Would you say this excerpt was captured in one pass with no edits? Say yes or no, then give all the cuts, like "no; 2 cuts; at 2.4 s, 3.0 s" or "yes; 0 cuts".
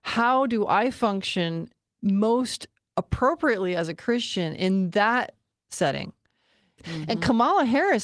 no; 1 cut; at 6.8 s